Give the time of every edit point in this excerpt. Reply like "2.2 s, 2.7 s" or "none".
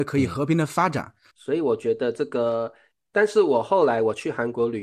1.3 s